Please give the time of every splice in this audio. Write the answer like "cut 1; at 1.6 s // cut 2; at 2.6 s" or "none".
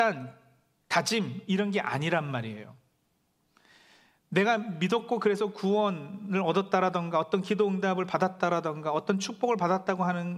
none